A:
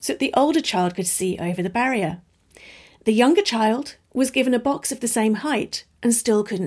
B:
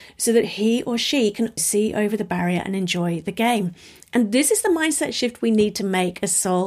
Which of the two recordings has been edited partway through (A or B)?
B